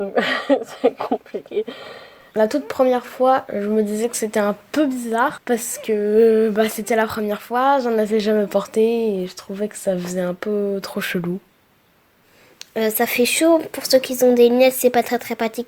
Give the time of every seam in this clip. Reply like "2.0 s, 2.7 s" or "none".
none